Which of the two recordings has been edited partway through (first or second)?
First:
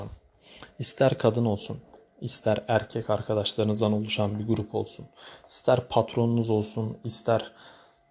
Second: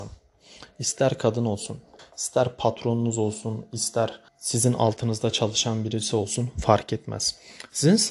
second